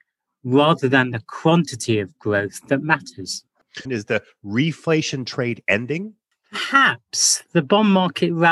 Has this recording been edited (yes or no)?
yes